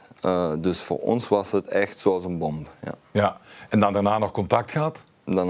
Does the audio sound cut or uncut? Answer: uncut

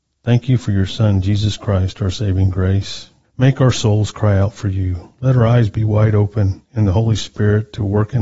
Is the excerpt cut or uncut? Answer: cut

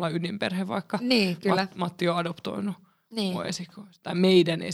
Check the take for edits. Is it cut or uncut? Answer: uncut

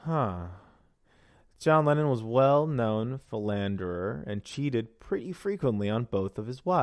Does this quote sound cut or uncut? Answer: uncut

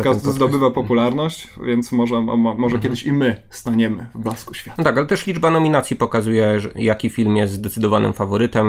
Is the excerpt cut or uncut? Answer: uncut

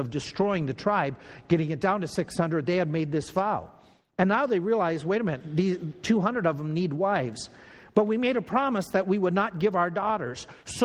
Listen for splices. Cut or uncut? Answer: uncut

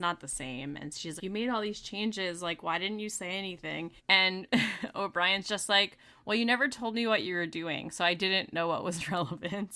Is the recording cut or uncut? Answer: cut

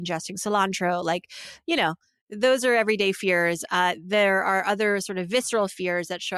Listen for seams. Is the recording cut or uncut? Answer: uncut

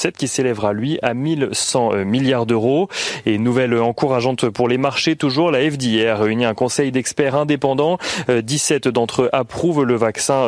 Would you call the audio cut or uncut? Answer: uncut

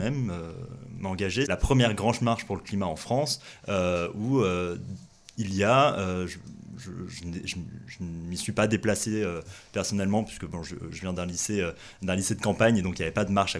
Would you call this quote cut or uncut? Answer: cut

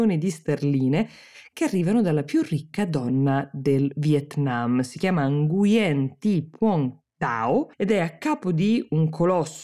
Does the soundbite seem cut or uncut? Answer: cut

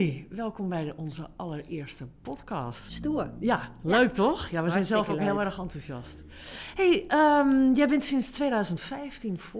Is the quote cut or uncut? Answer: uncut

